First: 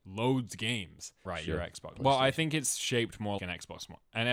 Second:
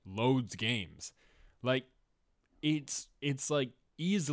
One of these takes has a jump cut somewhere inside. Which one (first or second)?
first